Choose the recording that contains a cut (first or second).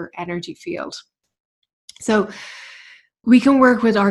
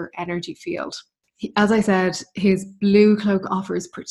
second